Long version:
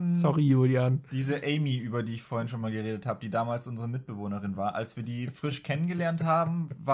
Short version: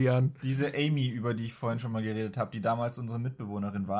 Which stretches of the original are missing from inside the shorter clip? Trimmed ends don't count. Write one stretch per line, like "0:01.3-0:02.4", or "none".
none